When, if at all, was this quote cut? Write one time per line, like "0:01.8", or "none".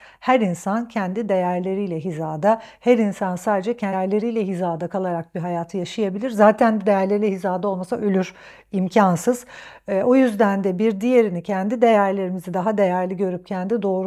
0:03.9